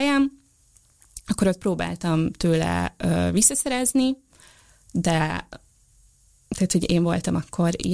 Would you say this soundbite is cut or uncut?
uncut